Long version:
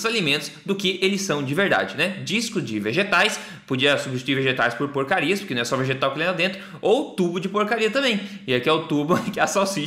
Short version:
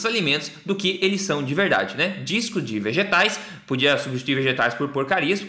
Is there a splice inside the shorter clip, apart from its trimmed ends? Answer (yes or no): no